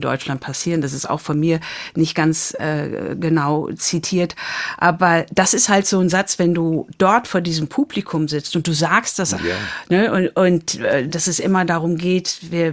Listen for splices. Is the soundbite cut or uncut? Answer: cut